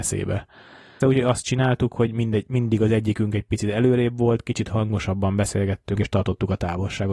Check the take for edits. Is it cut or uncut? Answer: cut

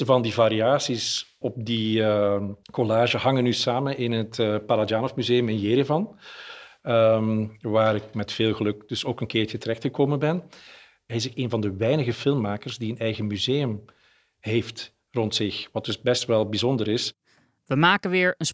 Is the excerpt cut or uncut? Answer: cut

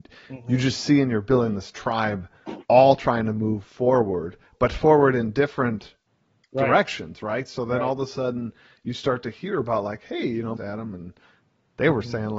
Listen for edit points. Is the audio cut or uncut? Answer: cut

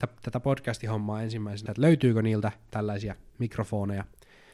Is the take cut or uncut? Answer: cut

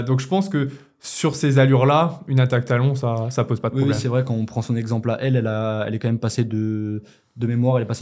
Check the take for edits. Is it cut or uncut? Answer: uncut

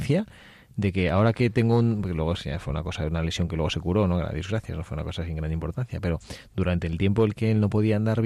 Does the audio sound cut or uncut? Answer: uncut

